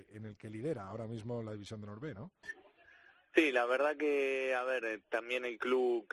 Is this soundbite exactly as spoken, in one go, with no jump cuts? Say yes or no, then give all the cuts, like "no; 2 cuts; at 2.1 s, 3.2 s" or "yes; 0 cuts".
no; 1 cut; at 2.4 s